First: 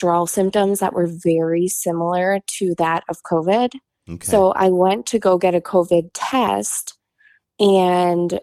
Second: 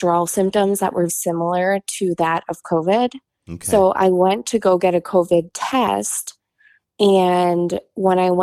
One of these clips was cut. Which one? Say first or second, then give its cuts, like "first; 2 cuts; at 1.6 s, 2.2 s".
second; 1 cut; at 1.1 s